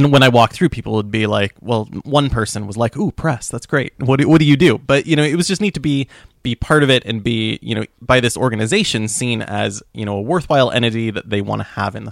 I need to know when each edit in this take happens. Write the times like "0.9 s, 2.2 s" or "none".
none